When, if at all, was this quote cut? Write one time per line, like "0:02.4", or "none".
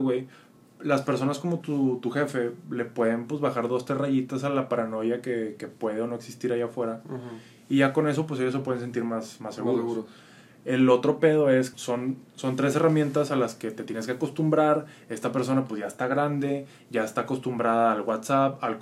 0:11.7